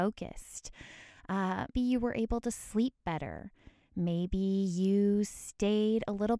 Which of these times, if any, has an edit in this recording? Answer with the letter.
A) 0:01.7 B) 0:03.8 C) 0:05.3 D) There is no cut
A